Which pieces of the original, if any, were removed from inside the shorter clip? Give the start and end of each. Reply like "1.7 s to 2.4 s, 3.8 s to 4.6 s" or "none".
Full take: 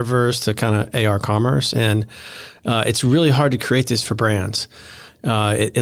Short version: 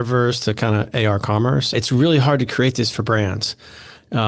1.7 s to 2.8 s